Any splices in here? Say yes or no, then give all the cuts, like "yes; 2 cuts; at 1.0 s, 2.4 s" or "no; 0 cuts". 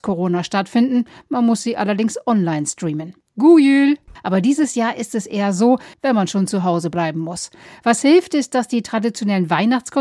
yes; 2 cuts; at 4.2 s, 5.9 s